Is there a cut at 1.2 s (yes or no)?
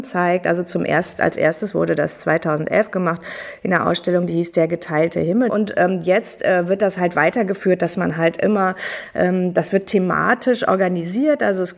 no